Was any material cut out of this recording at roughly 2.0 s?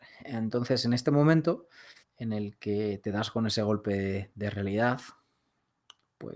yes; 1 cut; at 2.0 s

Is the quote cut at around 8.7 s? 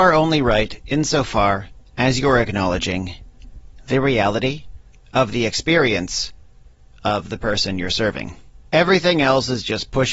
yes; 1 cut; at 8.7 s

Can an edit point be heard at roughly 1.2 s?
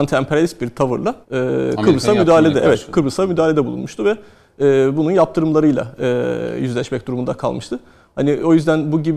yes; 1 cut; at 1.2 s

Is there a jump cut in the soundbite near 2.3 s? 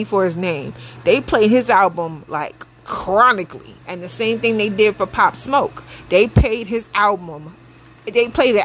no; 1 cut; at 3.8 s

